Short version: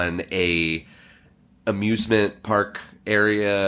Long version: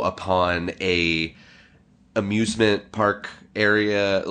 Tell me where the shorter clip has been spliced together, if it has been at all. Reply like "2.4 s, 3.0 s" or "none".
none